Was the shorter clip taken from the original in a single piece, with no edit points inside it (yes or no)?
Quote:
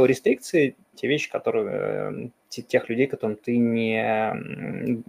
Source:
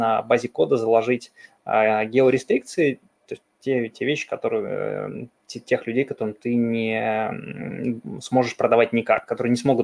no